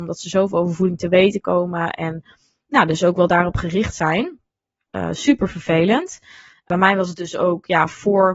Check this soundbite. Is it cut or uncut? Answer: cut